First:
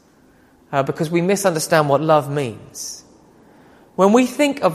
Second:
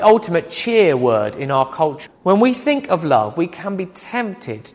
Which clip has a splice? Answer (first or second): second